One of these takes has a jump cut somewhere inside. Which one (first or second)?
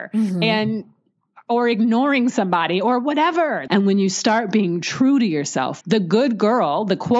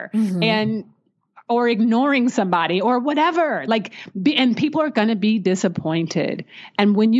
first